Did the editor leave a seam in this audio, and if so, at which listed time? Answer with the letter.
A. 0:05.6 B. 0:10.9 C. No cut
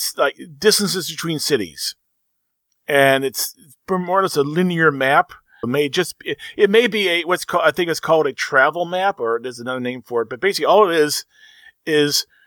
A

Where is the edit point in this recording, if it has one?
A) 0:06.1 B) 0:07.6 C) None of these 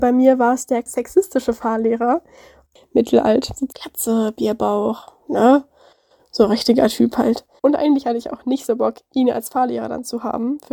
B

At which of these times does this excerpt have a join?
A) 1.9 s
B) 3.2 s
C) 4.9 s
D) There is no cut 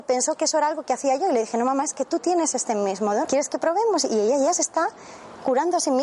B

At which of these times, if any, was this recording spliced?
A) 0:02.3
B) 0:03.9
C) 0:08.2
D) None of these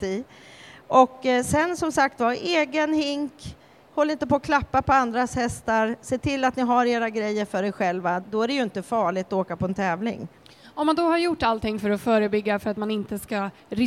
C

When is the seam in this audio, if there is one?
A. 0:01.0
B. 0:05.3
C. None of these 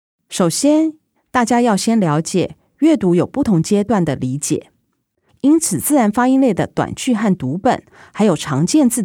B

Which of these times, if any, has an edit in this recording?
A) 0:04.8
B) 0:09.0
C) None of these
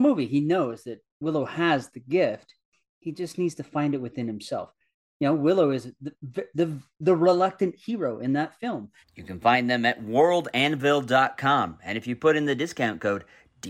B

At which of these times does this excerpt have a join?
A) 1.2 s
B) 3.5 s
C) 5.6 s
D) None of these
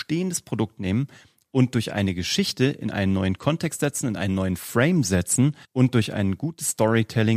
C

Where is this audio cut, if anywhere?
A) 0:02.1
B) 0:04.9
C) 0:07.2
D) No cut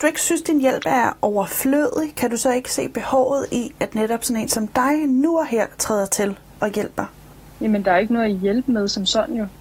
D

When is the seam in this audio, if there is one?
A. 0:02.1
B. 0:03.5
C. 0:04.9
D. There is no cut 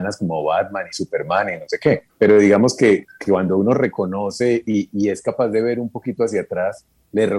A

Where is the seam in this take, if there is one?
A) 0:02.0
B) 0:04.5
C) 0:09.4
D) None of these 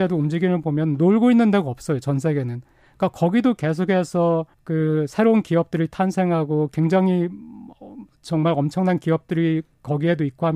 B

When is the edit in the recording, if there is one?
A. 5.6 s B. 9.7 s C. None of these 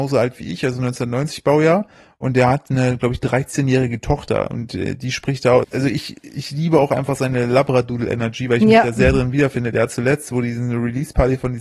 A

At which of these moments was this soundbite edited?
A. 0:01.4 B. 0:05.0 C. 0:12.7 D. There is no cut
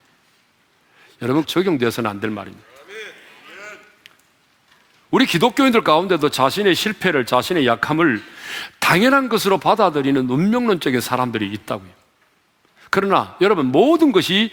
A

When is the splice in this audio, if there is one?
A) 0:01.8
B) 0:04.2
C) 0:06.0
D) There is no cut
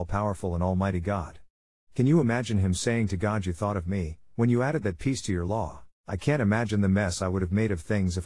C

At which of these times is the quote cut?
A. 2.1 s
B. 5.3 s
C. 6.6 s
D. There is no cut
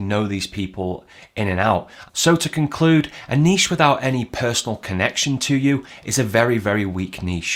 A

